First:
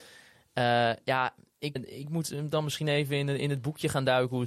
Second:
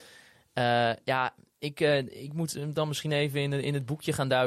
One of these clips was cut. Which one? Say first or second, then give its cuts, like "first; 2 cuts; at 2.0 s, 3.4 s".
first; 1 cut; at 1.8 s